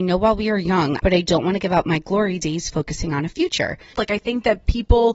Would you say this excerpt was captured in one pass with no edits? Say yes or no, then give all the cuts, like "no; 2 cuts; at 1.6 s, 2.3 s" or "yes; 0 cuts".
no; 2 cuts; at 1.0 s, 3.9 s